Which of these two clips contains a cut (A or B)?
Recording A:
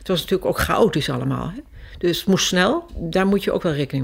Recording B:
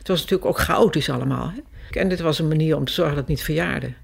B